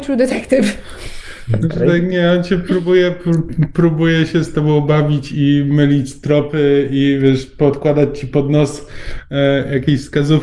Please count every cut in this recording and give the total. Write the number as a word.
zero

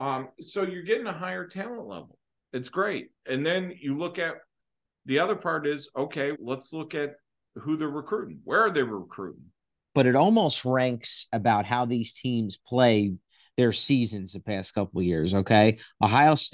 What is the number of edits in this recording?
two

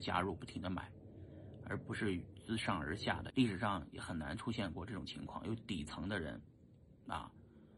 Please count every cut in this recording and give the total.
one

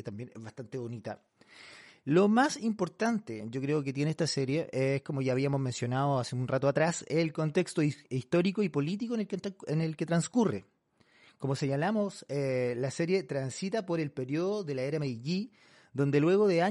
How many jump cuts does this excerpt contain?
zero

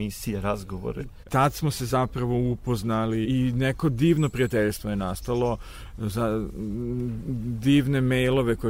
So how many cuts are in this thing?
two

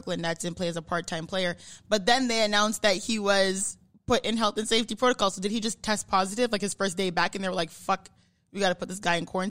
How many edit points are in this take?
zero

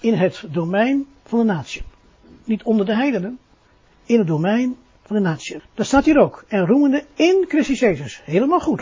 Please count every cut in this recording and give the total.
one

